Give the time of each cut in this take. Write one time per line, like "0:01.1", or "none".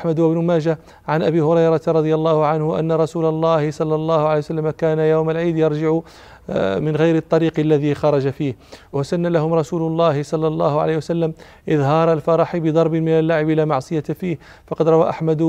0:06.8